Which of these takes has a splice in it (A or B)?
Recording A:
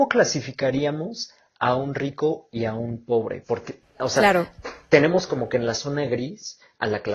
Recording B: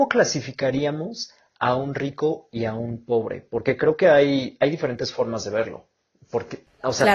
A